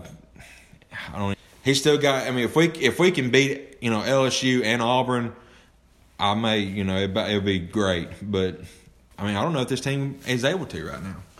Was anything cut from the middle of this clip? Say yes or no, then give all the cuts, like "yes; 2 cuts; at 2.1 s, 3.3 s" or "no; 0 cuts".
yes; 1 cut; at 1.3 s